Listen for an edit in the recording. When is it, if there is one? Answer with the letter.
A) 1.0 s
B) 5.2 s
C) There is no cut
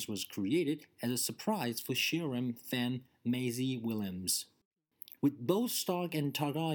B